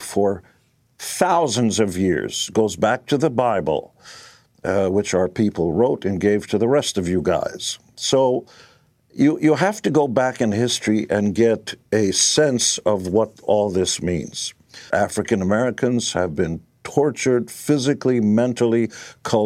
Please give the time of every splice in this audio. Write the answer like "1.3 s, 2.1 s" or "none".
14.9 s